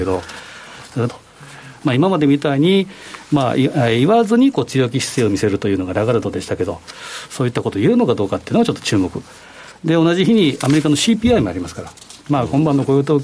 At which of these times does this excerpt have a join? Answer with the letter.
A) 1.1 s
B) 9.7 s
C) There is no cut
A